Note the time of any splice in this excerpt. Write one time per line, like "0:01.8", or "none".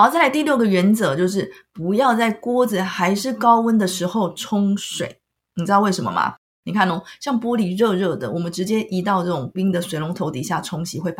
0:09.5